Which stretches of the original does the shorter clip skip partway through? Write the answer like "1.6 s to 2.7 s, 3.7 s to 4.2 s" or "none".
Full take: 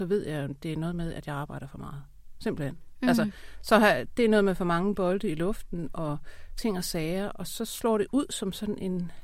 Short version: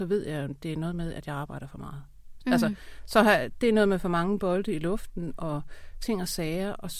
2.4 s to 2.9 s